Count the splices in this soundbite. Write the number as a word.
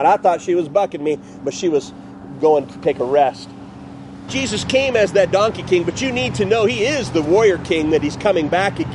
one